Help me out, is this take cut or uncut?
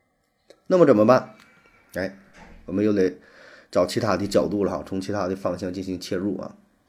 uncut